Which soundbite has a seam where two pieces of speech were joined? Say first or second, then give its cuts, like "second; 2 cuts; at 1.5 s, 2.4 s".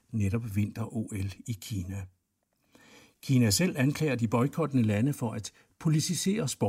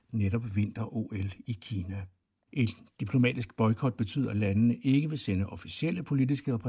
second; 1 cut; at 2.5 s